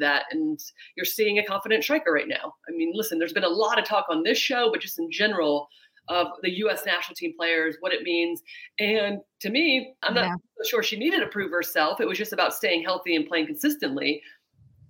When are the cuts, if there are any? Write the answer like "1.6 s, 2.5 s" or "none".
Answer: 10.0 s

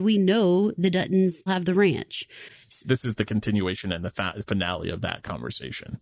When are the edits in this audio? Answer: 1.5 s, 2.8 s

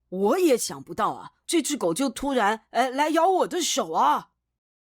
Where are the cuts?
1.4 s

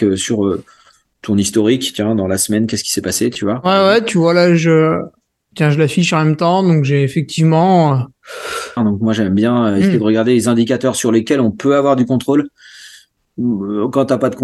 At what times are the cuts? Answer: 8.8 s

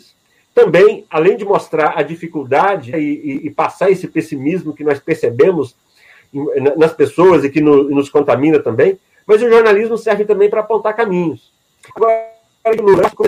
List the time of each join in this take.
2.9 s, 11.9 s

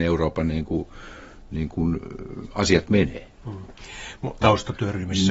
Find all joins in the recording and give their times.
4.4 s

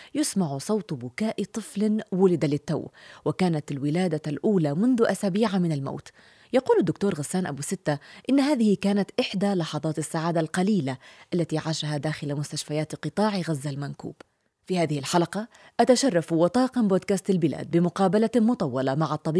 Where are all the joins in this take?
none

